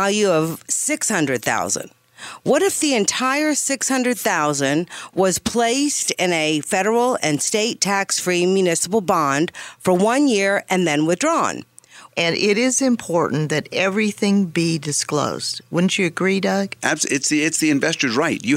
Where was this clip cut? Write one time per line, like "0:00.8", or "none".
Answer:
0:12.1
0:16.8